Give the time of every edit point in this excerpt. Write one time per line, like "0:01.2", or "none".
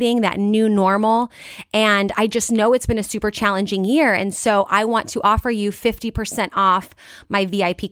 none